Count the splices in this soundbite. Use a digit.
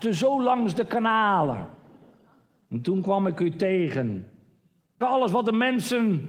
1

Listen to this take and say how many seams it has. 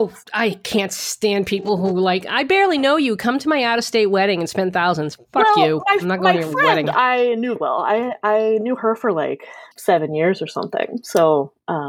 2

